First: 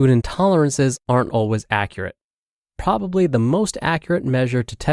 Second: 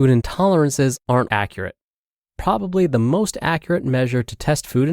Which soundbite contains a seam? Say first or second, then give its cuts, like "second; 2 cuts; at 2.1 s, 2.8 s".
second; 1 cut; at 1.3 s